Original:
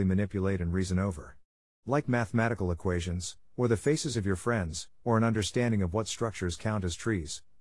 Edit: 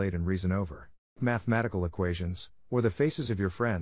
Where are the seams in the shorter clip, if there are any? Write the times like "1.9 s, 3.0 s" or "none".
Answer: 1.2 s

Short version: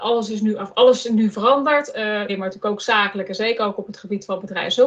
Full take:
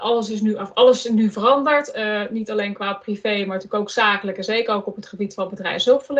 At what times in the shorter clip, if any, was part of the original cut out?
2.3 s

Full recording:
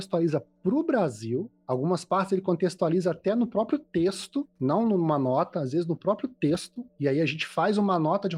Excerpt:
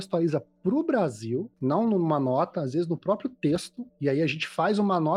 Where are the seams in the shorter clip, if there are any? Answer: 1.5 s

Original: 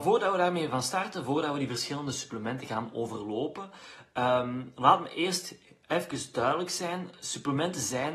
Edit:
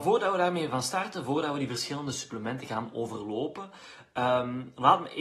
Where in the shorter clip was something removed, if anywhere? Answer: none

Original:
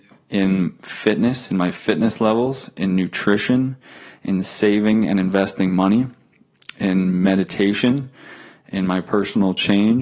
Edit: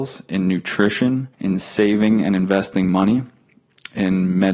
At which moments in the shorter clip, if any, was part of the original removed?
1.3 s

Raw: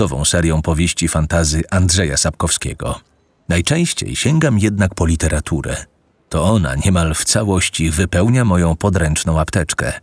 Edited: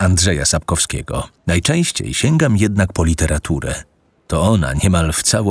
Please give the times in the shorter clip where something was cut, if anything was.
1.4 s

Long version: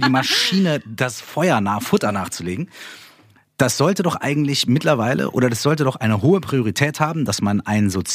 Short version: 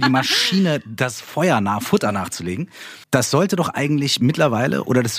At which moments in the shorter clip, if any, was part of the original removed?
3.0 s

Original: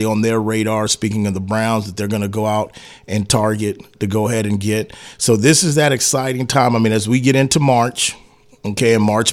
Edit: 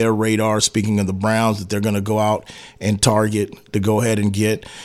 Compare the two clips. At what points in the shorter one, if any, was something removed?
none

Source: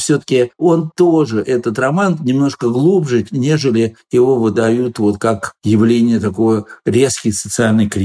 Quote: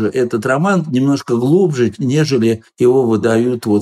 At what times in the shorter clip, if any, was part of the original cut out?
none

